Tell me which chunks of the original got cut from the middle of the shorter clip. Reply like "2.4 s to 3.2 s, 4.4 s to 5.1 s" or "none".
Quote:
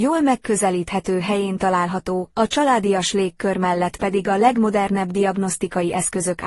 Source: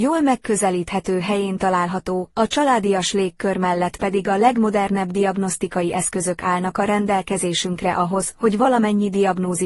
none